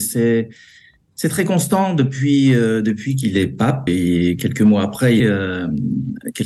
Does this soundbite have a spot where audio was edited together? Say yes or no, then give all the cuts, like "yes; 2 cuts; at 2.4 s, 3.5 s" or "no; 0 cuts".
yes; 2 cuts; at 3.9 s, 5.2 s